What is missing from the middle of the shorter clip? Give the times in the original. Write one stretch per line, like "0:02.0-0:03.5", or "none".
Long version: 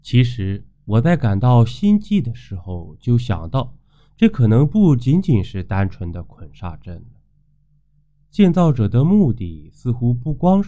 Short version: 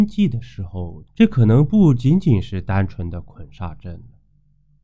0:03.0-0:04.1